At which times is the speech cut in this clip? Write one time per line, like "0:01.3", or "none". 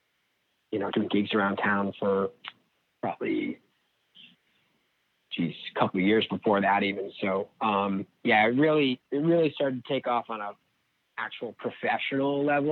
0:00.9